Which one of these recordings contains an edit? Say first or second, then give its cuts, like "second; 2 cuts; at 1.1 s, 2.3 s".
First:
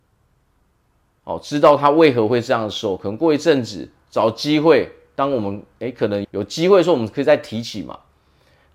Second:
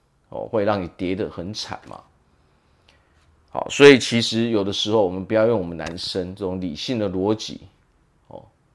first; 1 cut; at 6.2 s